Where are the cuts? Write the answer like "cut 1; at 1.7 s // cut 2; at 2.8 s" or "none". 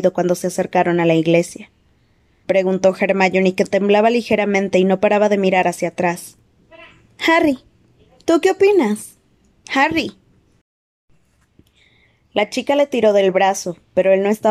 cut 1; at 2.4 s